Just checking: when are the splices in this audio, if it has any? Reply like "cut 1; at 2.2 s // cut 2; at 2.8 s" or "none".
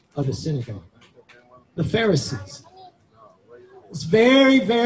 cut 1; at 1.6 s